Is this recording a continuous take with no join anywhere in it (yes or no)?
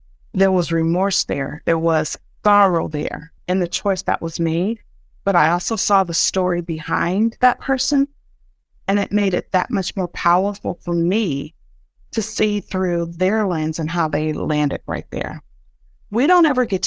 no